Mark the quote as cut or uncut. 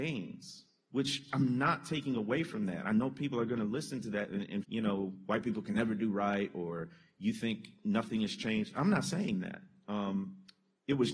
cut